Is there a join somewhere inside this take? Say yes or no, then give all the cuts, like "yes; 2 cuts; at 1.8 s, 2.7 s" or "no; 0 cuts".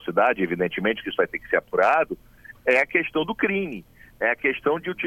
no; 0 cuts